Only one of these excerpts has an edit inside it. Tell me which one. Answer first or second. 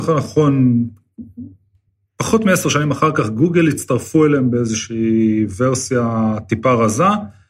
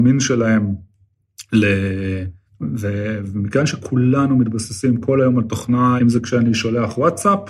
second